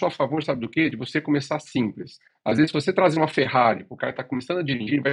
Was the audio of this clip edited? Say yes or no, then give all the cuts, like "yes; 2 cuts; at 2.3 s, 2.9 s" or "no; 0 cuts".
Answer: no; 0 cuts